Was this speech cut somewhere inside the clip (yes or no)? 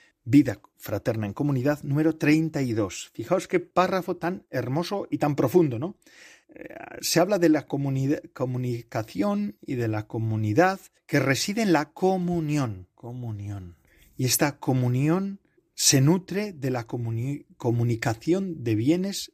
no